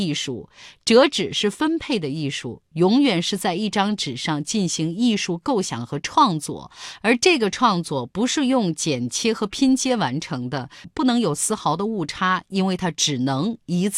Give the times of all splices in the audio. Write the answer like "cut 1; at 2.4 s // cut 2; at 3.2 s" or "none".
cut 1; at 10.8 s